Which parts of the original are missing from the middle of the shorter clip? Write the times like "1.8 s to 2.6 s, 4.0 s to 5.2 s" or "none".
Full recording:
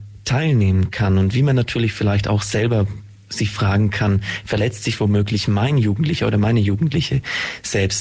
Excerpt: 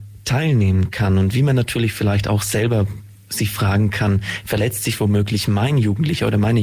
none